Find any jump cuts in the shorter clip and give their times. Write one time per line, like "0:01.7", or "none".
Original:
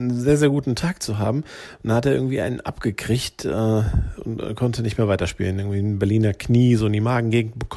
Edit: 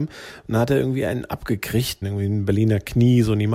0:02.0

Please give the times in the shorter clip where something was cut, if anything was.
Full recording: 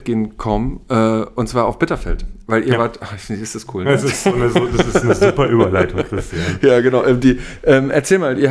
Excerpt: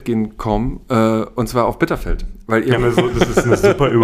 0:02.8

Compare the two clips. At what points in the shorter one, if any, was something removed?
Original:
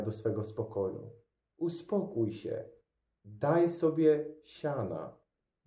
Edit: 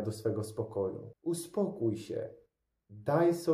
0:01.1

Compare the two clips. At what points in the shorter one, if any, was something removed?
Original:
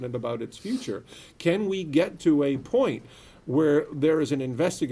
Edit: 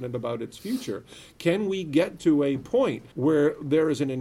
0:03.1

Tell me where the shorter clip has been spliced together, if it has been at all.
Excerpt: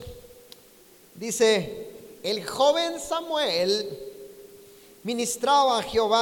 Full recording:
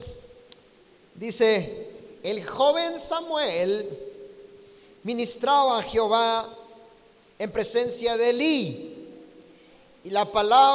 none

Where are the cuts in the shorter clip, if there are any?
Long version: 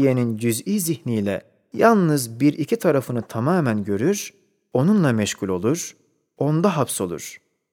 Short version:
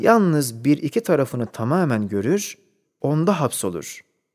0:02.8

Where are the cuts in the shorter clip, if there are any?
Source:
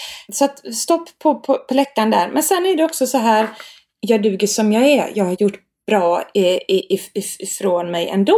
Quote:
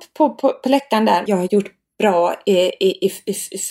0:01.3

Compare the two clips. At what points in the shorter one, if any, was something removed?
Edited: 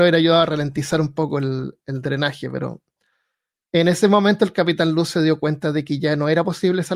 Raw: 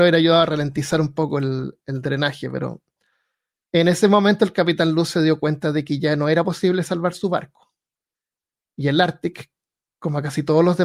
none

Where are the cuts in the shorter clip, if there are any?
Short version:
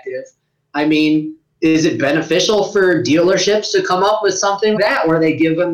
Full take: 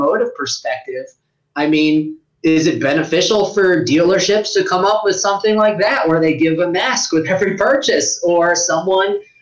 0:04.7

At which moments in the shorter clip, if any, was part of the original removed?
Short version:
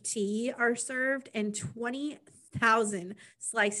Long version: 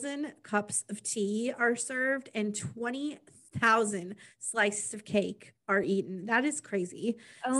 none

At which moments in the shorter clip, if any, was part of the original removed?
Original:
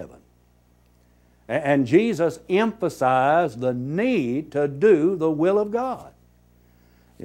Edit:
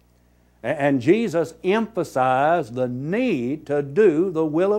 none

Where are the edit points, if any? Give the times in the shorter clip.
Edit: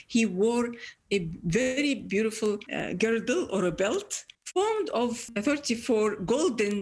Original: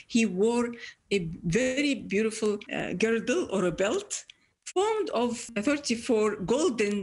0:04.3

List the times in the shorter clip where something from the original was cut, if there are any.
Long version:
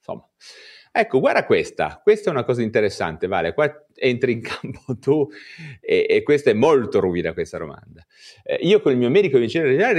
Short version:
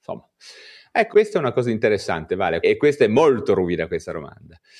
0:01.1
0:02.6

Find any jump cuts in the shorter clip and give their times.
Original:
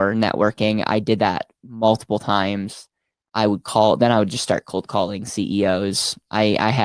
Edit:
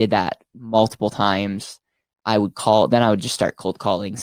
none

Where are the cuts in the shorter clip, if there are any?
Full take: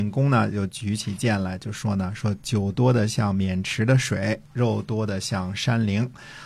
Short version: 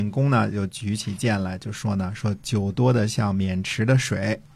none

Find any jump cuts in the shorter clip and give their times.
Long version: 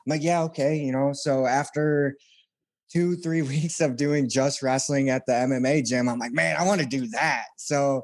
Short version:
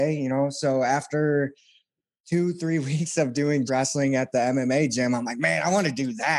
0:03.7

